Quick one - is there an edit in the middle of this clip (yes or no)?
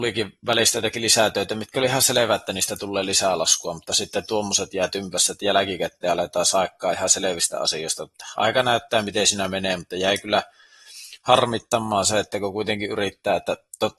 no